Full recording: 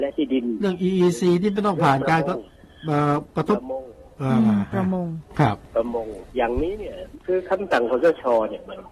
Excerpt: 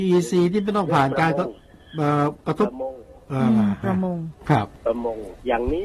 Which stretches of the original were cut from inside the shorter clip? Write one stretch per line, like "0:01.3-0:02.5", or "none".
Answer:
none

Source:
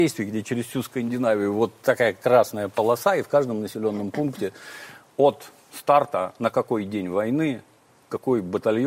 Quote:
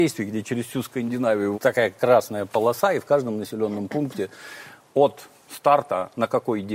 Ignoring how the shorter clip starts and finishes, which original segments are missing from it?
0:01.5-0:01.8

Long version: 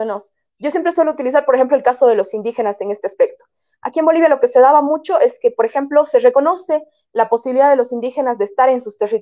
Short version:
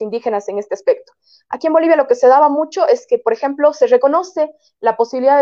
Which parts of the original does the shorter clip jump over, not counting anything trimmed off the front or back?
none

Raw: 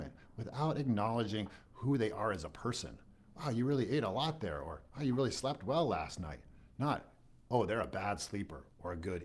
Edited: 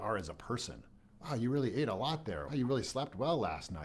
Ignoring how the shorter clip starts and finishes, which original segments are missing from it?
0:04.6-0:05.0

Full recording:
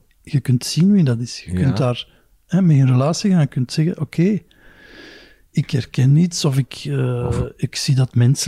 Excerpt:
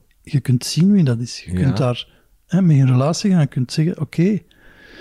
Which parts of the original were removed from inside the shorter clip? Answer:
none

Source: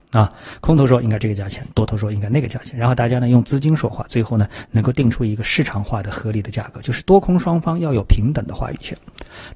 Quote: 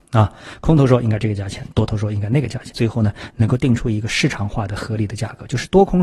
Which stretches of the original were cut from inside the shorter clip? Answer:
0:02.7-0:04.1

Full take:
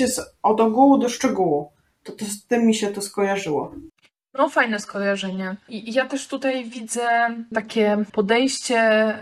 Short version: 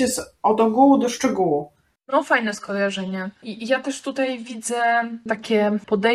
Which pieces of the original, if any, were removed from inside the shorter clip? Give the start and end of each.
0:02.0-0:04.2

